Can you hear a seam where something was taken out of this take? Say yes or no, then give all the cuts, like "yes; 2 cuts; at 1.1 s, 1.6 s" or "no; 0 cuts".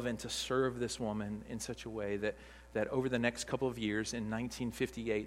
no; 0 cuts